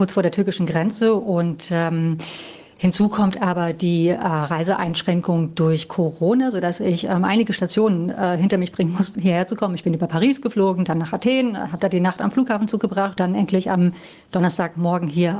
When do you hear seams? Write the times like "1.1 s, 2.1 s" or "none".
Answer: 9.2 s, 13.2 s